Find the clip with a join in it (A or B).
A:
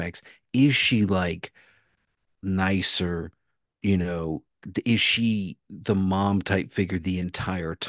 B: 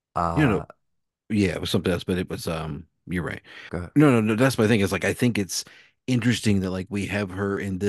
B